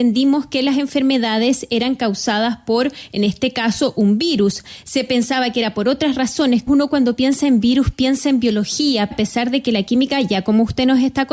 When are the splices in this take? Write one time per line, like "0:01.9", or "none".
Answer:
0:06.7
0:09.1